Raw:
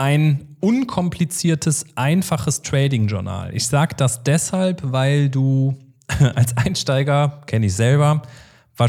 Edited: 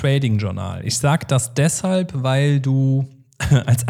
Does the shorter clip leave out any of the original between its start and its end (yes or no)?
no